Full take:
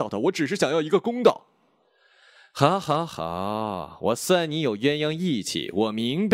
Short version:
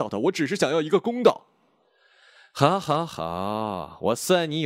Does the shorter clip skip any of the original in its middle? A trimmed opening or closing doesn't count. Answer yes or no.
no